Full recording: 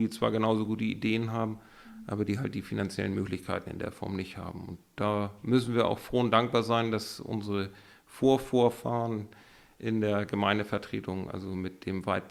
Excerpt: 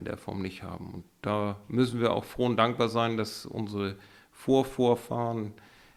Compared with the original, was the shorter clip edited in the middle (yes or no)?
no